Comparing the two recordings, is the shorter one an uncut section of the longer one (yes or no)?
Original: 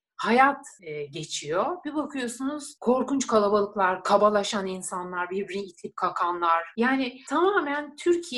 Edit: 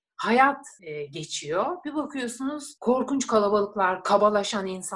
yes